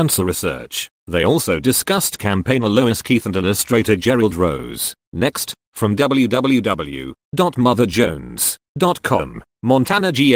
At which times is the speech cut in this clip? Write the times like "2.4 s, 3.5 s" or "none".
none